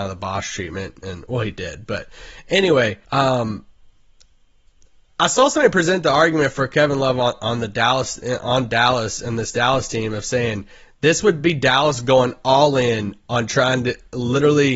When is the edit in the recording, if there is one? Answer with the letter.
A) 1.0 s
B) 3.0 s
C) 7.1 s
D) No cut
B